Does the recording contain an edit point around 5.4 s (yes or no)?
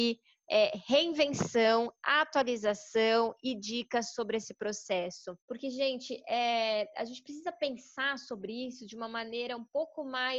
yes